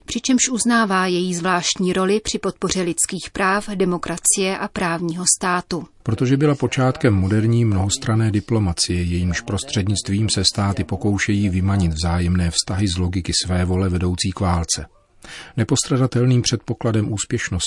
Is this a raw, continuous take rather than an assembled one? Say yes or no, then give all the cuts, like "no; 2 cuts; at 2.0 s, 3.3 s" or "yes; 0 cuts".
no; 1 cut; at 6.0 s